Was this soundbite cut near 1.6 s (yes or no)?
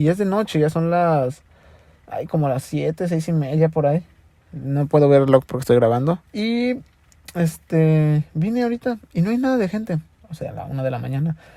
no